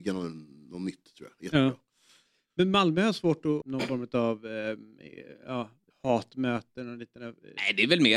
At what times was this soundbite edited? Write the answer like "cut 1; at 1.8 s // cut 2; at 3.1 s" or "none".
cut 1; at 3.6 s // cut 2; at 5.9 s